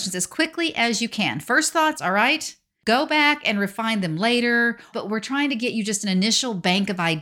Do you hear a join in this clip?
yes; 2 cuts; at 1.9 s, 4.9 s

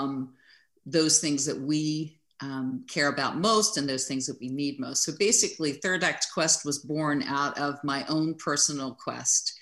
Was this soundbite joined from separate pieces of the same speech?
no; 0 cuts

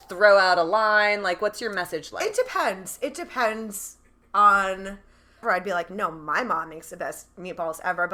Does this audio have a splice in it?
yes; 1 cut; at 5.4 s

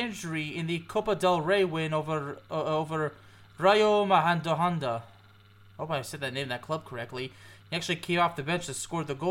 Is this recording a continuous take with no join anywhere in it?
yes; 0 cuts

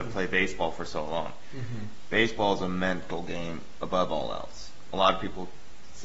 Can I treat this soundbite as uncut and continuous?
yes; 0 cuts

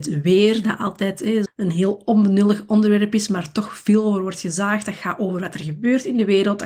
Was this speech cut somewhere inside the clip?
yes; 1 cut; at 1.5 s

